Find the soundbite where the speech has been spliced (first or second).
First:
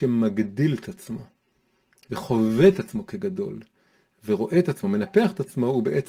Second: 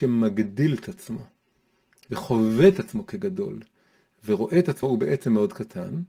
second